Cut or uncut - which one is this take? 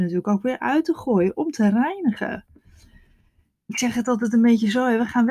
uncut